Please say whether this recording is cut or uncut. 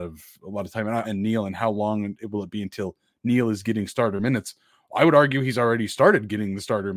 cut